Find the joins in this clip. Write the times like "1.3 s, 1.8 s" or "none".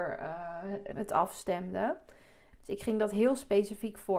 0.9 s, 2.5 s